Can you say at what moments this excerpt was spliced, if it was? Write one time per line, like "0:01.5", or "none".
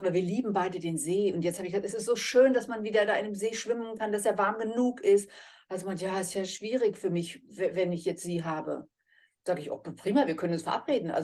none